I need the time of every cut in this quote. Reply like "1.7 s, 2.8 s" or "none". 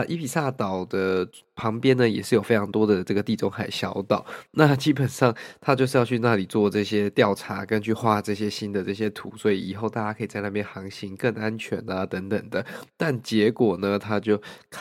none